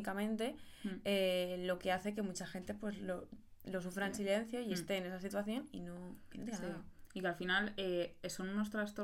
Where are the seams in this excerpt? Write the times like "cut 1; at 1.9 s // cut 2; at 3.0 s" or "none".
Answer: none

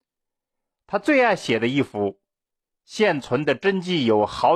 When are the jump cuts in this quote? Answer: none

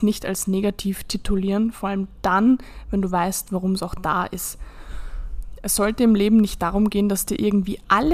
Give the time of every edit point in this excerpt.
cut 1; at 5.6 s

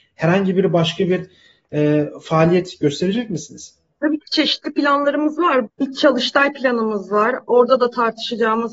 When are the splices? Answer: cut 1; at 5.7 s

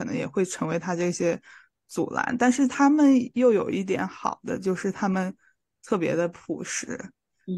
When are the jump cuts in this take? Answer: none

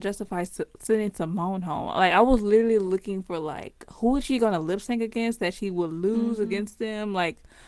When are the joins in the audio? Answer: none

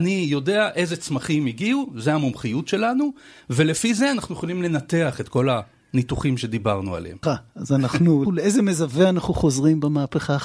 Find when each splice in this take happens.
cut 1; at 7.2 s // cut 2; at 8.3 s

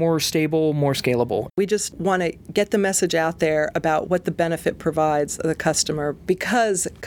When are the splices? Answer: cut 1; at 1.5 s

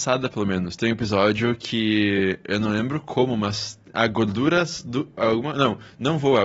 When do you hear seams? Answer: cut 1; at 5.2 s

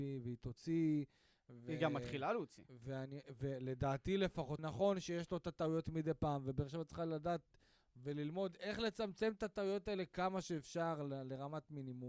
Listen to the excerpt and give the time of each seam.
cut 1; at 4.6 s

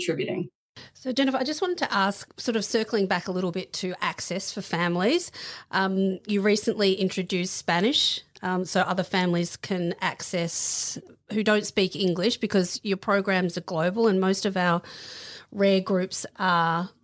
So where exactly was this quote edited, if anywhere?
none

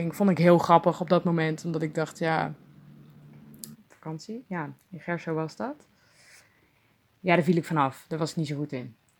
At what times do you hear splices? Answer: cut 1; at 3.7 s

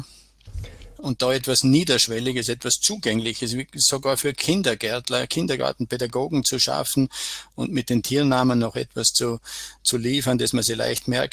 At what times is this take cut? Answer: cut 1; at 1.0 s

